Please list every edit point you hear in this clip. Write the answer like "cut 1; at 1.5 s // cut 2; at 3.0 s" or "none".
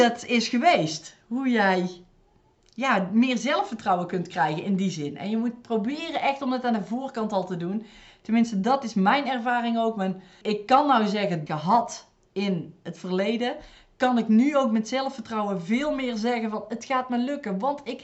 cut 1; at 10.4 s // cut 2; at 11.5 s